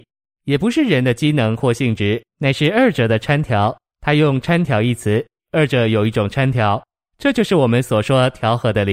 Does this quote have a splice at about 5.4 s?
yes; 1 cut; at 5.4 s

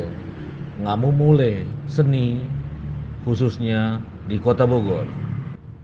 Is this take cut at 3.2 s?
yes; 1 cut; at 3.2 s

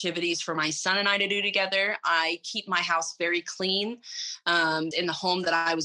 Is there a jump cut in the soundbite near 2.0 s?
no; 1 cut; at 4.9 s

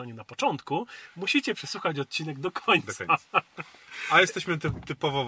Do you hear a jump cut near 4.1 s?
no; 0 cuts

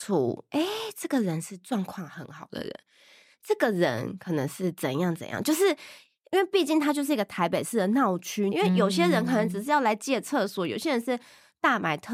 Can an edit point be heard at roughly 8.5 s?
yes; 1 cut; at 8.5 s

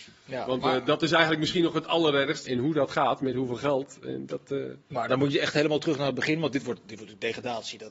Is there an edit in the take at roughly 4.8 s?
yes; 2 cuts; at 2.5 s, 4.8 s

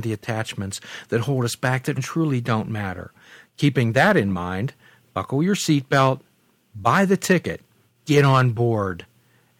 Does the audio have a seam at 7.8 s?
no; 1 cut; at 2.0 s

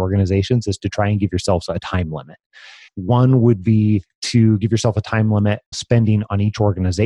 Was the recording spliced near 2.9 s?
yes; 2 cuts; at 2.9 s, 5.7 s

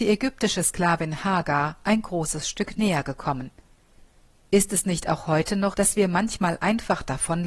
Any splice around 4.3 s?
yes; 2 cuts; at 4.3 s, 5.7 s

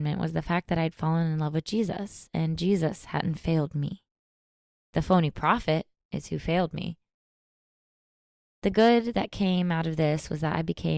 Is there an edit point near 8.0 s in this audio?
no; 0 cuts

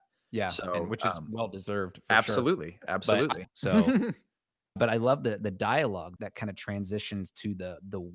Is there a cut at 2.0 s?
no; 3 cuts; at 3.4 s, 4.8 s, 6.2 s

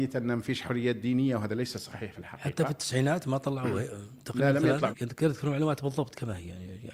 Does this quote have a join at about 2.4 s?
no; 1 cut; at 4.9 s

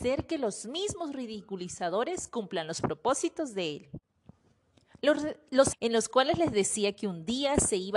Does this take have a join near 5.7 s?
yes; 1 cut; at 5.7 s

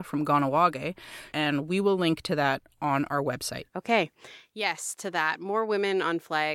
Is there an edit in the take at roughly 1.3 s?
yes; 1 cut; at 1.3 s

